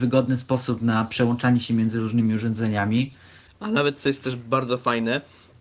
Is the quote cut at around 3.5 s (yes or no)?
yes